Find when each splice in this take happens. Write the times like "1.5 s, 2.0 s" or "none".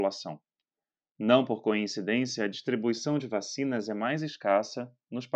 none